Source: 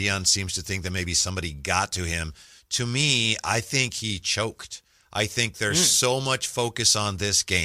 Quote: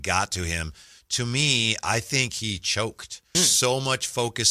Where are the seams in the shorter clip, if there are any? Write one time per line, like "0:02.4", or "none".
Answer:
0:03.3